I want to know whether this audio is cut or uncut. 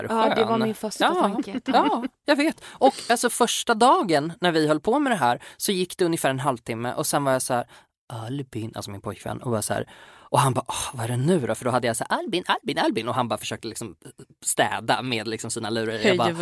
uncut